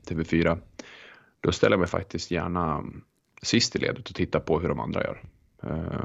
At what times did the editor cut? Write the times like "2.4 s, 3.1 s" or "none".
none